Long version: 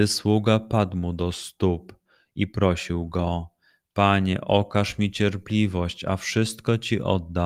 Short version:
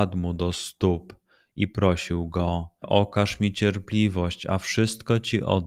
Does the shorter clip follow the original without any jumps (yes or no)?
no